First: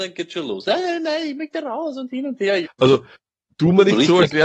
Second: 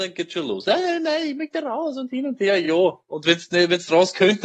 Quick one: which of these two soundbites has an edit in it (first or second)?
first